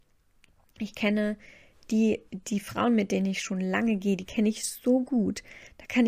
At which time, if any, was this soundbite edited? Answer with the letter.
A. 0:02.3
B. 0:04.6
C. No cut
A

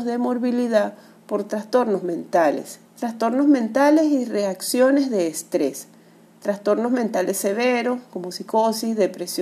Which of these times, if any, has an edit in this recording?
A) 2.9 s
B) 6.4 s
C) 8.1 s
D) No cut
A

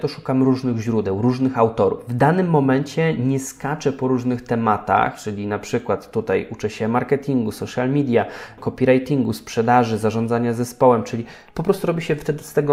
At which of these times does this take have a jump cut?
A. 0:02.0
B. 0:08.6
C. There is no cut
B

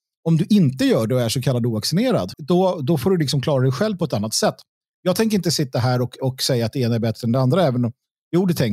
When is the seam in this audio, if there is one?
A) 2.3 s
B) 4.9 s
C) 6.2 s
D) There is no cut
A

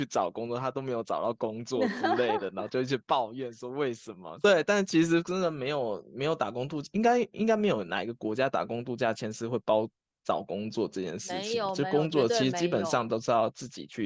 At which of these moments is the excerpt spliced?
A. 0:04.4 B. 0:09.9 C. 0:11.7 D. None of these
A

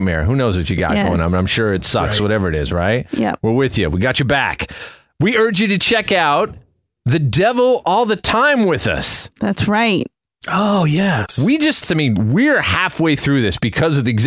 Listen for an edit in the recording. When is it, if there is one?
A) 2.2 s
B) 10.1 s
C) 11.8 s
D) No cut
C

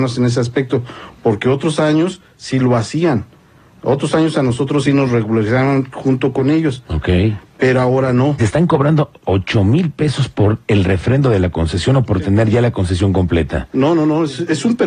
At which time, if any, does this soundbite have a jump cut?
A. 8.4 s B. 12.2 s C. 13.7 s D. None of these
A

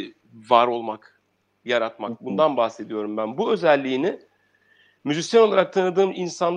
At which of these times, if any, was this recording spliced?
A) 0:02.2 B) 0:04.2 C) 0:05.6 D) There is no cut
D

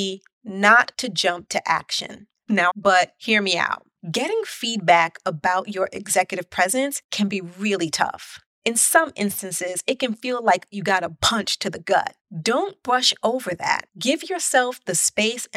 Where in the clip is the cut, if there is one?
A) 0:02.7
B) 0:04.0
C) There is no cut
A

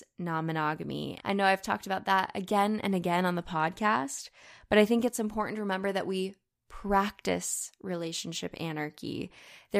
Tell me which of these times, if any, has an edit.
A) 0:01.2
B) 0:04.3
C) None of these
A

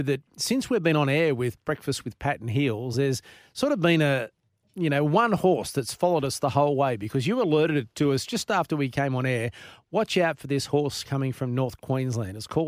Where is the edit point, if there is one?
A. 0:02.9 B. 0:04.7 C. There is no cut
C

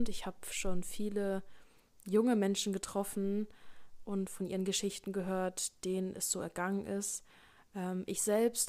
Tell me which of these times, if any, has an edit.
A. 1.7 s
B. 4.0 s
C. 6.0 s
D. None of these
D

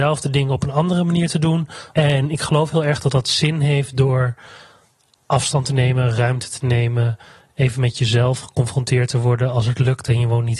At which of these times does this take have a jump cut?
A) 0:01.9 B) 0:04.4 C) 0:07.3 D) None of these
A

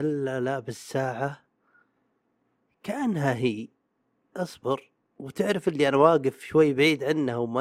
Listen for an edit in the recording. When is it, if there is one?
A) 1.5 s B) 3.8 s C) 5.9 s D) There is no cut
D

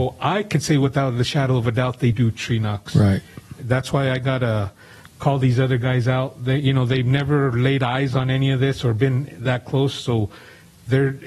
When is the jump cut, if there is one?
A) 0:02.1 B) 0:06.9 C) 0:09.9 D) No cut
A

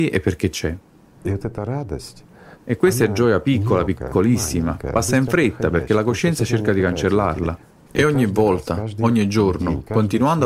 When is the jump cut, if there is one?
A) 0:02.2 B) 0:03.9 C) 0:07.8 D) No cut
C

